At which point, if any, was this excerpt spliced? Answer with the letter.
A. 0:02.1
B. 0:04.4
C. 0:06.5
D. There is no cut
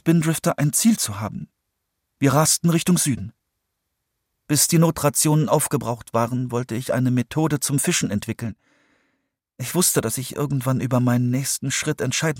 B